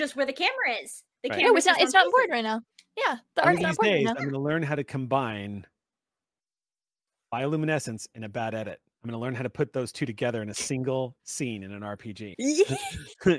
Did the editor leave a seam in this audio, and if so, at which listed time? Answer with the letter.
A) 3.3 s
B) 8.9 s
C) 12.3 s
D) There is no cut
C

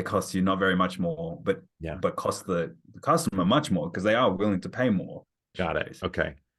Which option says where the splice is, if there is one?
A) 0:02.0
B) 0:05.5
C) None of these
B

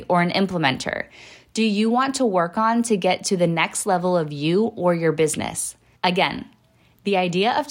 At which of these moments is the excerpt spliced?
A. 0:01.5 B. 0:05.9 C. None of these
B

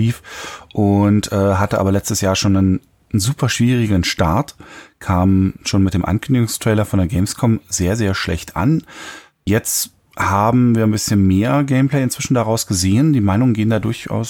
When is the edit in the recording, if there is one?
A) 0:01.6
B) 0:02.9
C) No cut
C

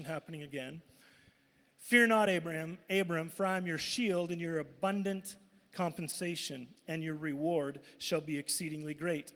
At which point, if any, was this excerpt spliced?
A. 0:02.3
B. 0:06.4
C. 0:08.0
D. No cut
D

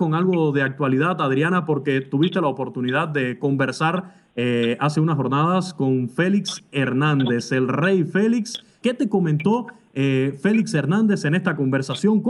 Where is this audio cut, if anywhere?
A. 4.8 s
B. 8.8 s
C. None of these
B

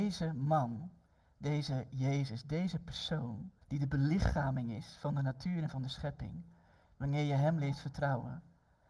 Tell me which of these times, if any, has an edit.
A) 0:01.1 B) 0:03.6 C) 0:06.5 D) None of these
B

